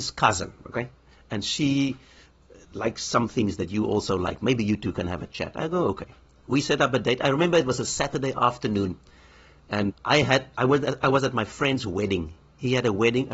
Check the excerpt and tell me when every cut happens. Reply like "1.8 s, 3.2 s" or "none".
9.9 s